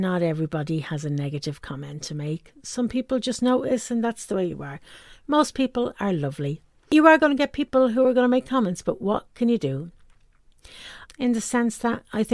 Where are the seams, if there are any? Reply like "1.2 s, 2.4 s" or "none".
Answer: 11.1 s